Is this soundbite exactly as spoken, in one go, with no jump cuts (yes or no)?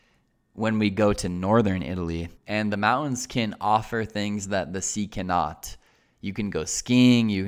no